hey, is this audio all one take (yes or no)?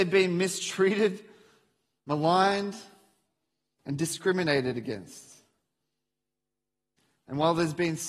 yes